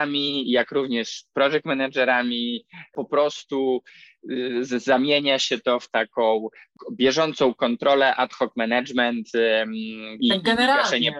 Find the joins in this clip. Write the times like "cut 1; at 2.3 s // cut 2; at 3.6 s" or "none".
cut 1; at 10.2 s